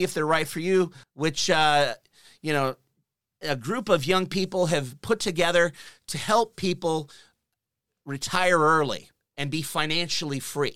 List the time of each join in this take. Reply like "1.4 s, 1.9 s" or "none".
1.0 s